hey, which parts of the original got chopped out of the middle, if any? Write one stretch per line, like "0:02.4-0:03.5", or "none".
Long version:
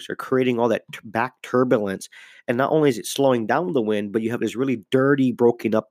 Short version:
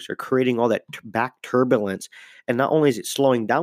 none